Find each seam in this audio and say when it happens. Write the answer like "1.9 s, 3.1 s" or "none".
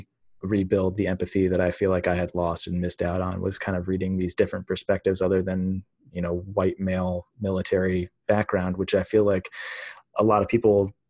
none